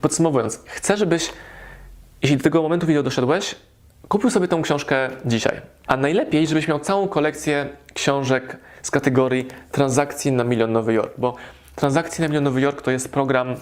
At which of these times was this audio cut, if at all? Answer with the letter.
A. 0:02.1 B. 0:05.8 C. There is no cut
B